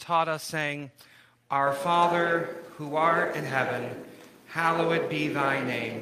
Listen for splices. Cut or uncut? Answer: uncut